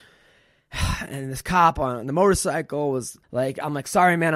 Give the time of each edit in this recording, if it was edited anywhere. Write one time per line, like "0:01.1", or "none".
0:03.2